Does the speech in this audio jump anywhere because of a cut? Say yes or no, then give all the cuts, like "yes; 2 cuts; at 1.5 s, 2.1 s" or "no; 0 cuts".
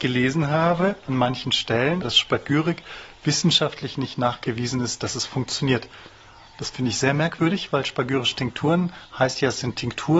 yes; 1 cut; at 2.0 s